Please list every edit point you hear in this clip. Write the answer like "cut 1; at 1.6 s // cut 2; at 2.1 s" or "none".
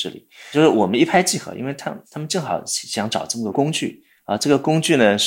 none